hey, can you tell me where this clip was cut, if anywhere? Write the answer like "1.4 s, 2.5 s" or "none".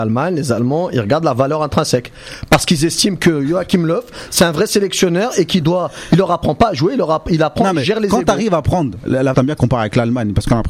9.3 s